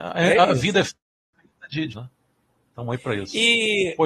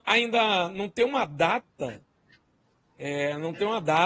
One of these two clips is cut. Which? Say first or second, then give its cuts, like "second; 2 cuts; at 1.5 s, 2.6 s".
first; 1 cut; at 1.9 s